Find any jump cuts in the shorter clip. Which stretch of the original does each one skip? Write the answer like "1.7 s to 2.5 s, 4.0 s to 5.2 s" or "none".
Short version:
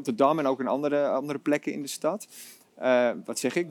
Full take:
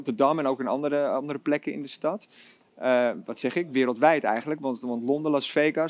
none